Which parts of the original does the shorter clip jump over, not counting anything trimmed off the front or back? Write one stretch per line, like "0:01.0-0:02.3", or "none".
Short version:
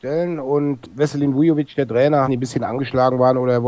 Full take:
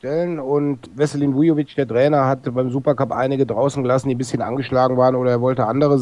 0:02.2-0:04.0